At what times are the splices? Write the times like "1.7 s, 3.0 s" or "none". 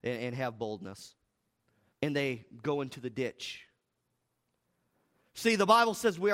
1.9 s

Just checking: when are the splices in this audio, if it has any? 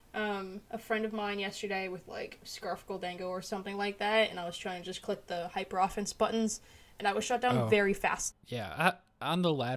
8.3 s

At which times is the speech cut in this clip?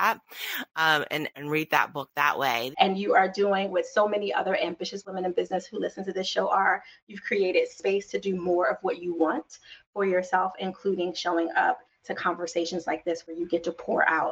1.3 s, 2.7 s

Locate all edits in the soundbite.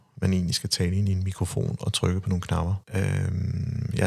2.8 s

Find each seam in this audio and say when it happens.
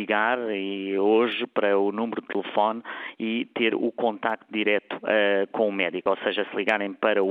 none

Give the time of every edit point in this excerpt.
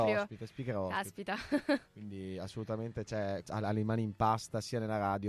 3.4 s

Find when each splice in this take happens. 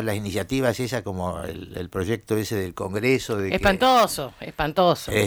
none

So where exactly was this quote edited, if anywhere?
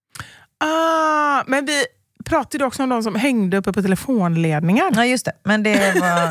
none

